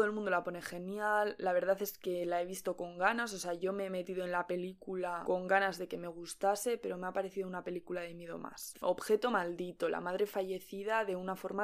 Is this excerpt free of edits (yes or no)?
no